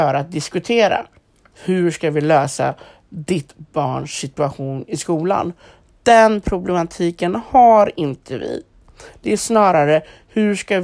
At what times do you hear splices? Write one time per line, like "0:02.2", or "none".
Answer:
none